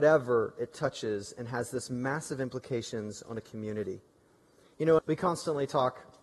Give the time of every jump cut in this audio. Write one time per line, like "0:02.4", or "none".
0:05.0